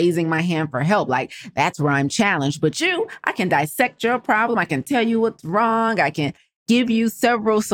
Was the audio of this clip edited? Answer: no; 0 cuts

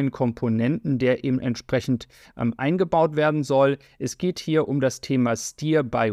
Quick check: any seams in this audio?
no; 0 cuts

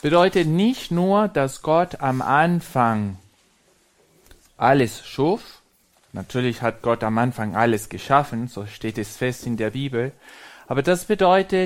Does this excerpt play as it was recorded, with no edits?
yes; 0 cuts

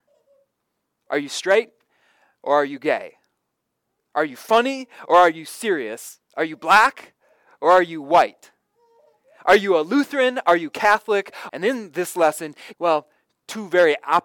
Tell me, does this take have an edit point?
yes; 2 cuts; at 11.5 s, 12.7 s

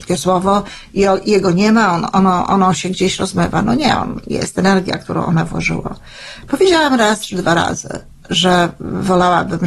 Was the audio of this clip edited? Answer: no; 0 cuts

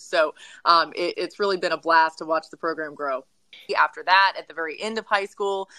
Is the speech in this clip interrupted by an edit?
yes; 2 cuts; at 1.1 s, 3.7 s

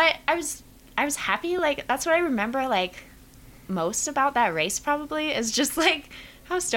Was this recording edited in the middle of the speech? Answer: no; 0 cuts

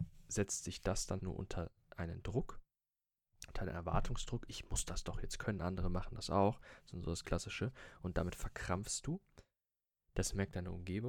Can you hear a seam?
yes; 2 cuts; at 1.2 s, 5.6 s

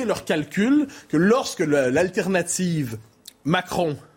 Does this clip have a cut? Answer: no; 0 cuts

